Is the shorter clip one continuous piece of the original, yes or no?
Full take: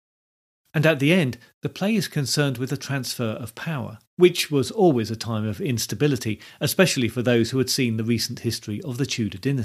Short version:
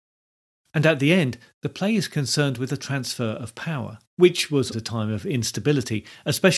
no